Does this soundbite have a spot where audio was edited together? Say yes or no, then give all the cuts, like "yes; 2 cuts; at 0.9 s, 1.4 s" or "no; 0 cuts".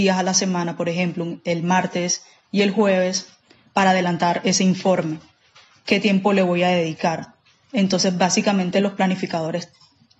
no; 0 cuts